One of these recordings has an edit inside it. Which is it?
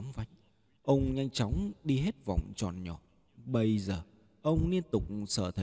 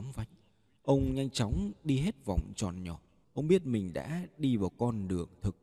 second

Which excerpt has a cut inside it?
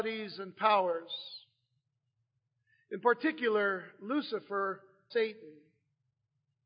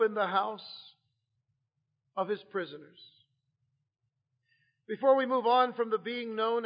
first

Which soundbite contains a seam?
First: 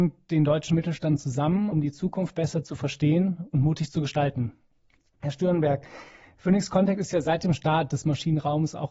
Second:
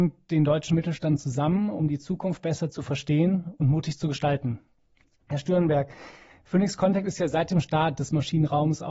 first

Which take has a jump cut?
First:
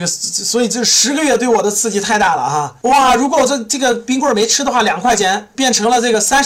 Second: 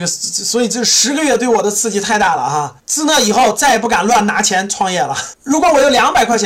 second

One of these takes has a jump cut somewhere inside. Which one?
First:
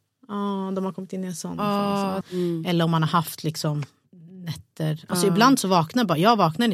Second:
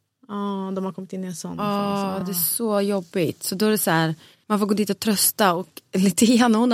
first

